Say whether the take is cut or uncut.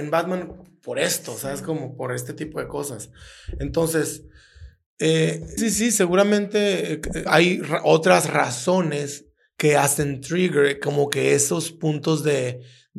cut